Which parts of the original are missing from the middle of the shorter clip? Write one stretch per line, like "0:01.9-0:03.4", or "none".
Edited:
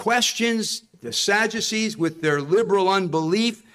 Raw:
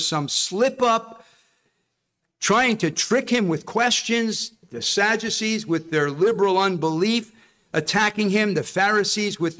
none